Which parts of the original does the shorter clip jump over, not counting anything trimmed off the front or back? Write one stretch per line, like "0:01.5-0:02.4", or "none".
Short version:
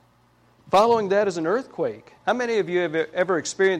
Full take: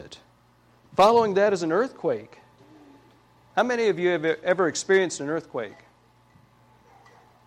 0:02.4-0:03.5